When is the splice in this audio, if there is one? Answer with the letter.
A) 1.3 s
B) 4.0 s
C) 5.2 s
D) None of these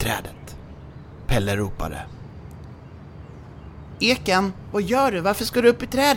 D